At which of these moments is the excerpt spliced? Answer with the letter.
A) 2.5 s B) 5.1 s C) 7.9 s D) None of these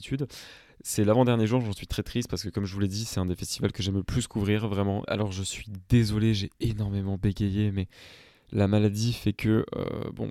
B